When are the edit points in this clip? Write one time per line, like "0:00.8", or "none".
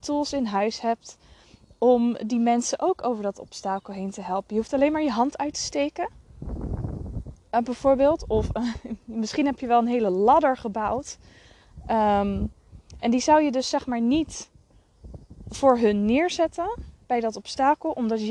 none